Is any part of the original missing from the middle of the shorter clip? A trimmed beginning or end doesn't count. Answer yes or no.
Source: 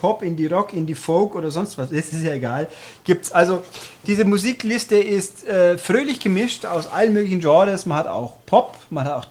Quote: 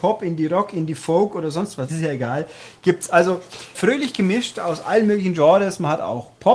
yes